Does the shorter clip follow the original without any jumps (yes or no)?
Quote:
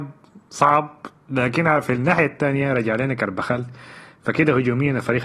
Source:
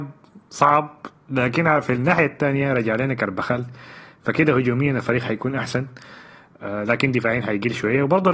yes